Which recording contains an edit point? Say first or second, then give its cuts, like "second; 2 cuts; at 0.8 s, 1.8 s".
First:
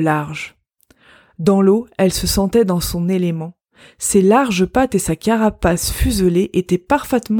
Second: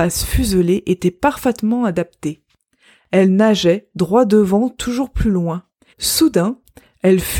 second; 1 cut; at 5.9 s